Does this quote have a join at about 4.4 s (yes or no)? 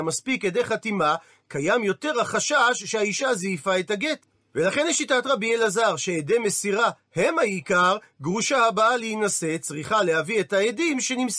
yes